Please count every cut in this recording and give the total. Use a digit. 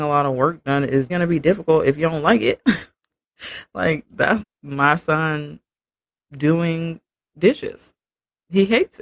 2